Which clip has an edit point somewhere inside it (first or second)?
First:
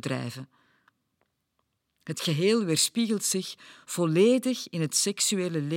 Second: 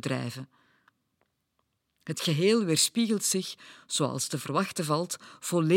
first